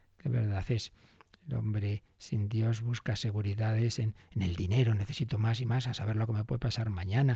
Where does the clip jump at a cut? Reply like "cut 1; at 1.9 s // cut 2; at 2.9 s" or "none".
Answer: none

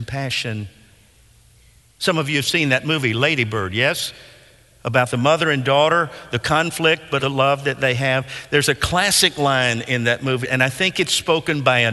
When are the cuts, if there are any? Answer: cut 1; at 7.2 s // cut 2; at 10.4 s

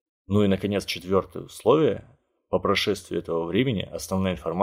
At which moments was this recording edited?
none

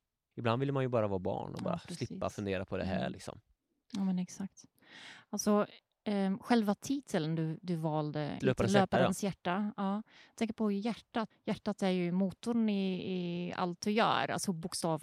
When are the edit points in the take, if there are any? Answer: cut 1; at 8.4 s // cut 2; at 11.3 s

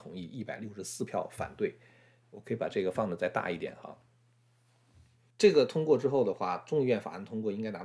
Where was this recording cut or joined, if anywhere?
cut 1; at 5.3 s

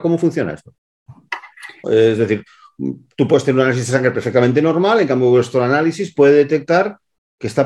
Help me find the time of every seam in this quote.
cut 1; at 1.8 s

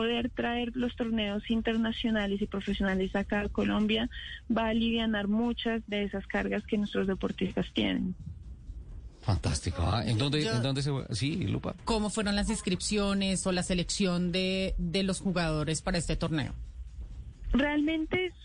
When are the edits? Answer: cut 1; at 11.8 s

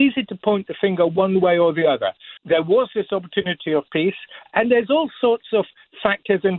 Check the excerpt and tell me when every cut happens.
cut 1; at 2.4 s // cut 2; at 4.5 s

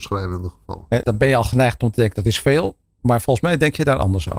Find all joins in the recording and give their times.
cut 1; at 1.0 s

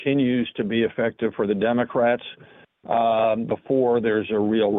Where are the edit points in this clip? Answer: none

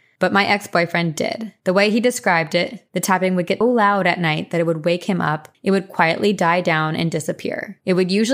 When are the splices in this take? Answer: cut 1; at 3.6 s // cut 2; at 5.5 s

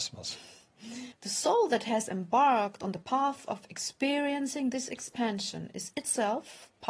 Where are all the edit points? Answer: cut 1; at 1.1 s

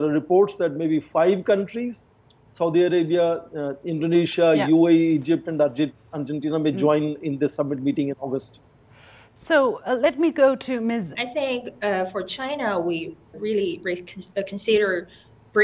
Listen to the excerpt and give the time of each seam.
cut 1; at 11.1 s // cut 2; at 13.3 s

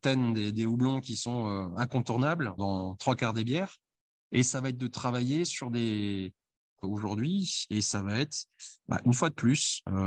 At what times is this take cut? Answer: cut 1; at 2.6 s // cut 2; at 6.8 s

